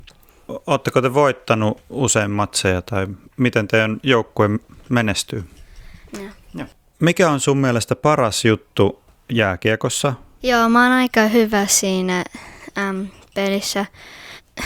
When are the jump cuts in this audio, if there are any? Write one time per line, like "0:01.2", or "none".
0:06.1
0:10.4